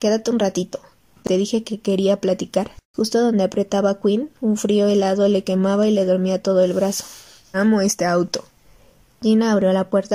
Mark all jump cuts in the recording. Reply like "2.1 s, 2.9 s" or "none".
2.8 s, 7.5 s